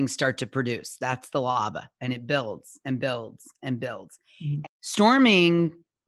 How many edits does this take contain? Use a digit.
1